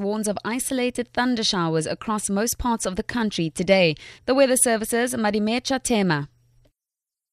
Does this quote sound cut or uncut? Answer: cut